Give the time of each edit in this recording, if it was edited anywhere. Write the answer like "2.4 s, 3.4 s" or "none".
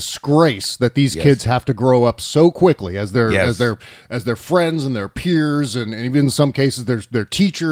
none